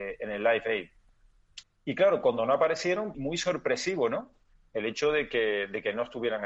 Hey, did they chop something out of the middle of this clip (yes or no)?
yes